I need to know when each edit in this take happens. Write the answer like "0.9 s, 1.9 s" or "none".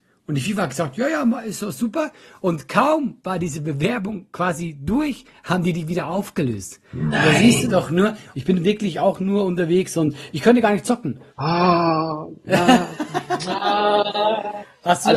8.3 s, 11.3 s